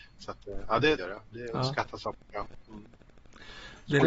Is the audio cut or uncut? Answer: cut